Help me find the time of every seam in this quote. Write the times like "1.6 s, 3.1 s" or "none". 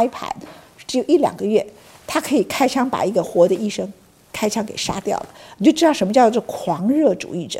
3.2 s

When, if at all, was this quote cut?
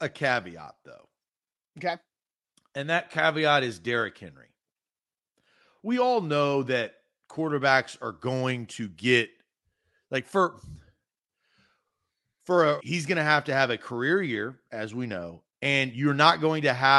12.8 s

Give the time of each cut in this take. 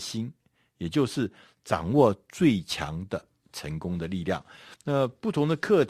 4.8 s

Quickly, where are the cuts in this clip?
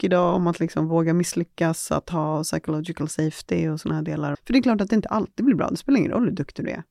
4.3 s

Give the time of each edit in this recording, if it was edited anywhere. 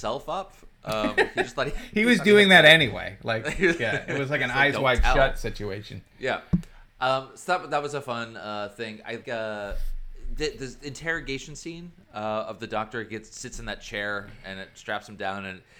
9.2 s

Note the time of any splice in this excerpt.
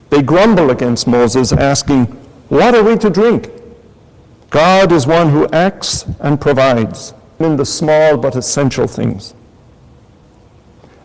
4.4 s, 7.4 s

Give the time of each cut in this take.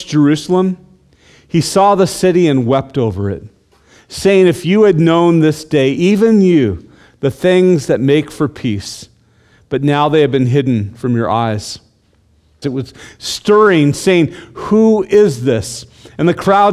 12.6 s

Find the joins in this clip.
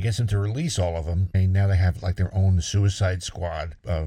1.3 s

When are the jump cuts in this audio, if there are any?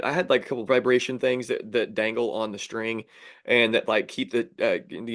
none

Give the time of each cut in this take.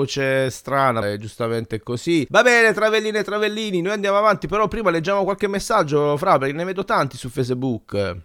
1.0 s, 2.3 s

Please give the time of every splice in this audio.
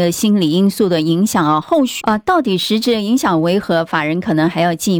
2.0 s

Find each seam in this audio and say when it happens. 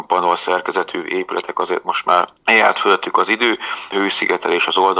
2.4 s, 3.9 s

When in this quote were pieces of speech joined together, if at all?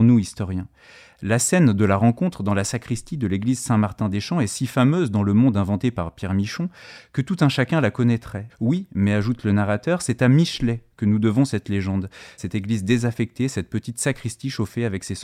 8.5 s, 12.4 s

